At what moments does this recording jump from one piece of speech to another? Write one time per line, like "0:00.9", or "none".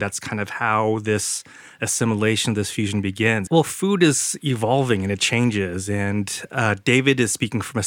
0:03.5